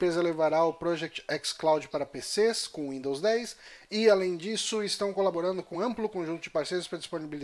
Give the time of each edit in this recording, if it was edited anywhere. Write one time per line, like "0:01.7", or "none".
0:05.7

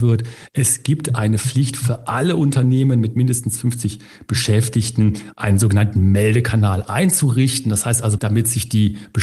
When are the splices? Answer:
0:08.2

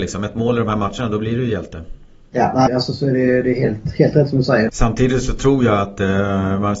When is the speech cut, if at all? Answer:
0:02.7
0:04.7

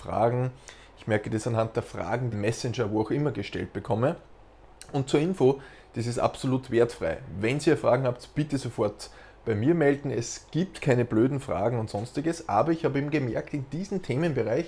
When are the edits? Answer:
0:02.3

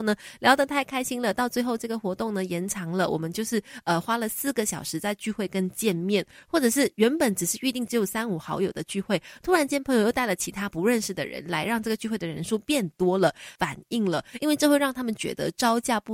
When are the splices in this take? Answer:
0:13.6

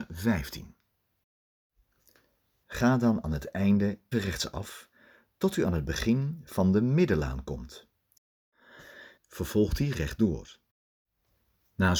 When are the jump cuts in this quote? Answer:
0:02.6
0:04.1
0:09.2

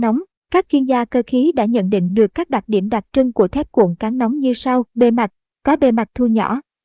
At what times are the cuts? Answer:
0:04.9

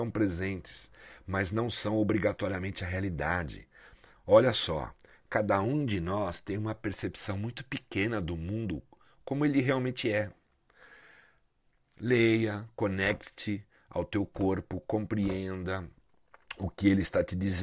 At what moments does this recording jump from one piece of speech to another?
none

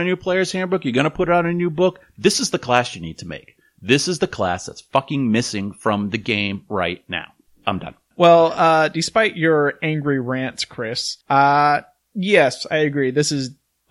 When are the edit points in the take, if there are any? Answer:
0:11.2

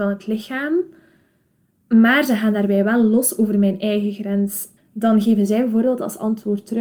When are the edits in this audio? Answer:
0:04.8

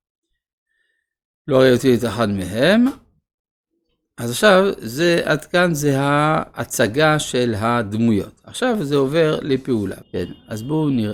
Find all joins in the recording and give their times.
0:10.0

